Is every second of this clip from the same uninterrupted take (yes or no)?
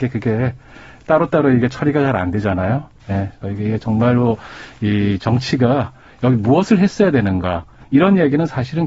no